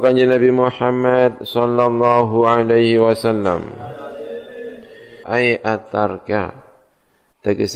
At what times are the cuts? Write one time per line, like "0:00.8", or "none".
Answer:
0:05.2